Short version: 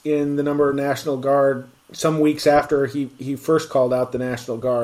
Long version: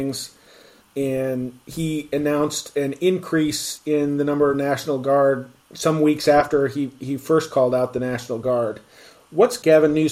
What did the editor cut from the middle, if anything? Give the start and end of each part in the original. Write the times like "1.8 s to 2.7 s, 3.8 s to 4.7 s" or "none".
none